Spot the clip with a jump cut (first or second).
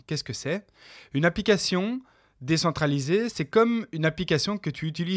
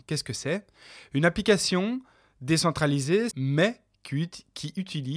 second